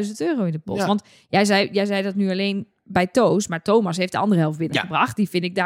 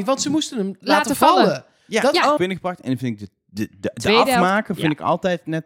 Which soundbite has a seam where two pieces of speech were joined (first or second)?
second